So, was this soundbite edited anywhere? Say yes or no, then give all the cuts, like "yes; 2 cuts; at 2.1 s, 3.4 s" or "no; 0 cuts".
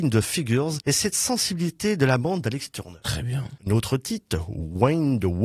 no; 0 cuts